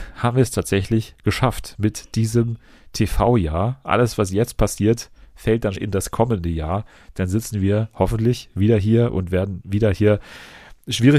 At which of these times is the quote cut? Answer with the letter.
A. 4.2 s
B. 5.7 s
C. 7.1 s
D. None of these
B